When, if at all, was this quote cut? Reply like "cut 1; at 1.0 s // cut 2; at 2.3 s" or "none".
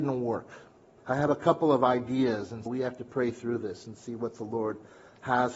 cut 1; at 1.0 s // cut 2; at 2.7 s